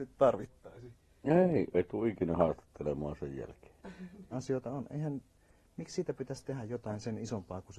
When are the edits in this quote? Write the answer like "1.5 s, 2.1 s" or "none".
1.7 s, 4.3 s